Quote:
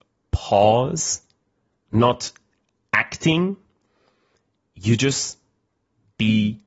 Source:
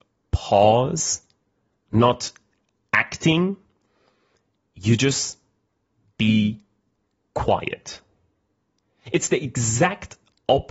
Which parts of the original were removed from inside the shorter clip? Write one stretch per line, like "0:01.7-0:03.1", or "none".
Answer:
none